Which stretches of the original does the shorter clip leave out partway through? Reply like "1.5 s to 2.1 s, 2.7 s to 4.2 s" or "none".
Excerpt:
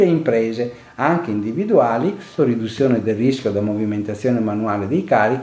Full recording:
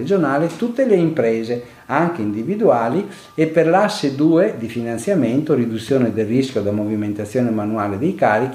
3.3 s to 5.5 s